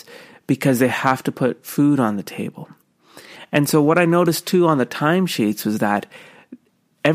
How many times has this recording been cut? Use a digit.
0